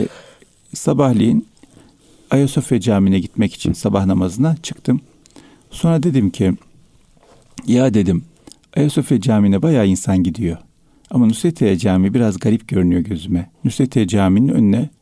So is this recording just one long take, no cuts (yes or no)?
no